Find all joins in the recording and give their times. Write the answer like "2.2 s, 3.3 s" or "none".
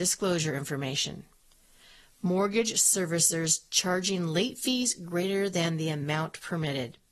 none